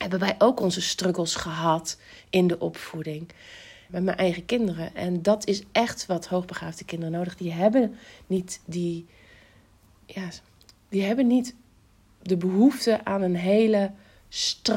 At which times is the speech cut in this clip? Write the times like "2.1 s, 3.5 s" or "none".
3.9 s